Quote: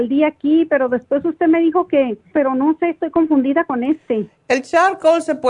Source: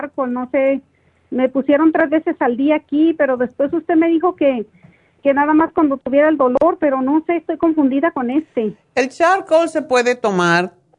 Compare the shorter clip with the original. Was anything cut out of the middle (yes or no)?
yes